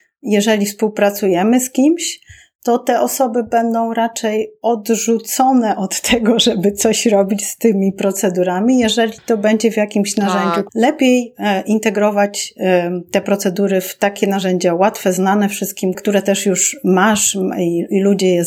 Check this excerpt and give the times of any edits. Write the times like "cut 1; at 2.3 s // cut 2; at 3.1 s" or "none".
cut 1; at 10.7 s // cut 2; at 15.9 s

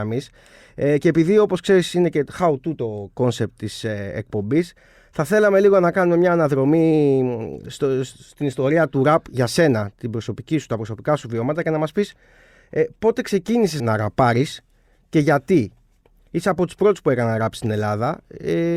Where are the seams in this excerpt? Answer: cut 1; at 13.8 s

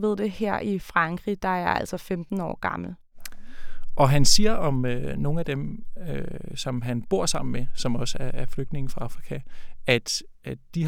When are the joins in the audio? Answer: none

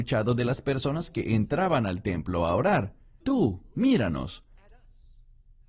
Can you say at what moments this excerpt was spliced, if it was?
cut 1; at 3.2 s

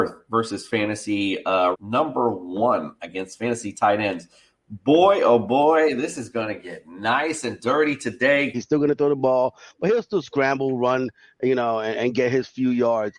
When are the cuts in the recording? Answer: cut 1; at 1.7 s // cut 2; at 8.5 s

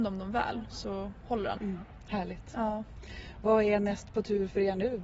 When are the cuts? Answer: cut 1; at 1.6 s

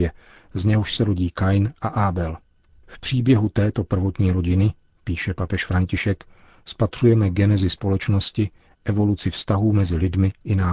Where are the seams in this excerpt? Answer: none

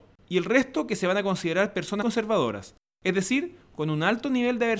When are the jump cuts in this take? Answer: cut 1; at 2.0 s

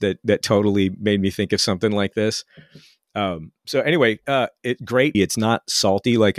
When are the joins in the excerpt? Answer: cut 1; at 5.1 s

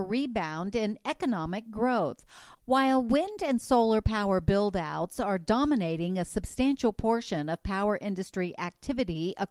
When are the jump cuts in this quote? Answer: cut 1; at 2.6 s

